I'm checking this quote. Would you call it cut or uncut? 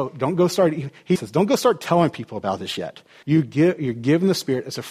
cut